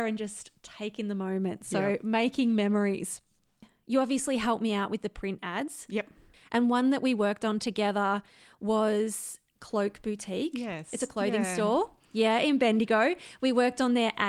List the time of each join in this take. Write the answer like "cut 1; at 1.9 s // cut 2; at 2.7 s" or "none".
none